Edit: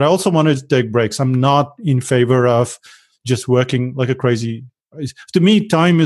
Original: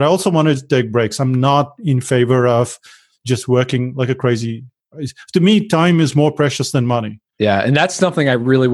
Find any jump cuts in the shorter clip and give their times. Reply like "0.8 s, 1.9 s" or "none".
none